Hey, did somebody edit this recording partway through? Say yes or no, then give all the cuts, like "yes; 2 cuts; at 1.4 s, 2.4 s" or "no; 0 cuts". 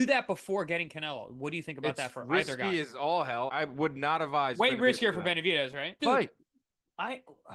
yes; 2 cuts; at 3.5 s, 6.0 s